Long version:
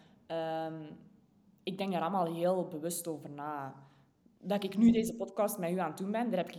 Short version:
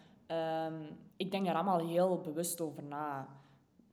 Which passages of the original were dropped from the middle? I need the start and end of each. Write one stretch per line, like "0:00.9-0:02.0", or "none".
0:01.1-0:01.6